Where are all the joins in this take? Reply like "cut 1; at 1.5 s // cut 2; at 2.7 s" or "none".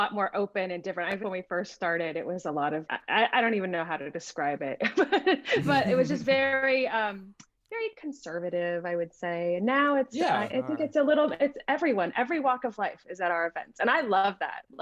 cut 1; at 1.2 s // cut 2; at 2.9 s